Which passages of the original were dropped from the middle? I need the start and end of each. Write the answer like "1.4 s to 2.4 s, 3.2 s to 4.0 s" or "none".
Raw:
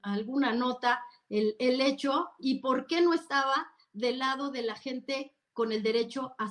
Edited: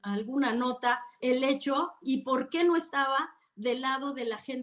1.2 s to 1.6 s